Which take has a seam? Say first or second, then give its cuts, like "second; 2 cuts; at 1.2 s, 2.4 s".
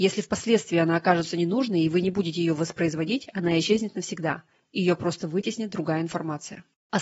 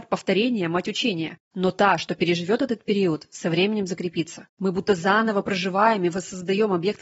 second; 2 cuts; at 1.4 s, 4.5 s